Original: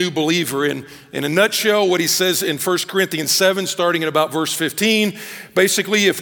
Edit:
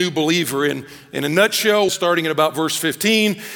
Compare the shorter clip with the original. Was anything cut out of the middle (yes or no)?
yes